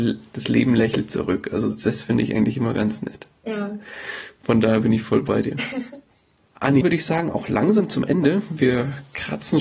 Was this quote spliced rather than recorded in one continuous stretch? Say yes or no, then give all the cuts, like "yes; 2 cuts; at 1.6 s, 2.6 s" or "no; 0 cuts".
yes; 1 cut; at 6.8 s